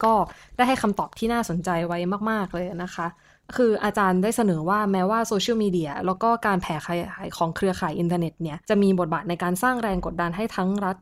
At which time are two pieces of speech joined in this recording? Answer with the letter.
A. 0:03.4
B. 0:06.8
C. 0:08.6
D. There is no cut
C